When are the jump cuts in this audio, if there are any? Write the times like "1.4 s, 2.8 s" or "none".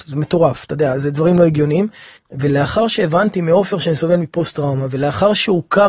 2.2 s